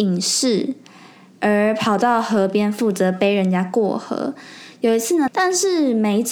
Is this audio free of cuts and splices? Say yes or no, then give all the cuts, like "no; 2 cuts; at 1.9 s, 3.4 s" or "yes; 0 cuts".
no; 1 cut; at 5.3 s